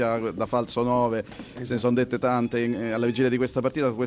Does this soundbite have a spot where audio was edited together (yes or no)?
no